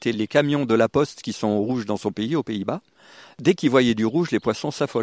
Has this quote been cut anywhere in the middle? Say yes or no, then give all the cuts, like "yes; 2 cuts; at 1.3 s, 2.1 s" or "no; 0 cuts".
no; 0 cuts